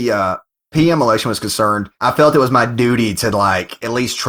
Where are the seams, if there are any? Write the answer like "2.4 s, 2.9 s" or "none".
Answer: 2.0 s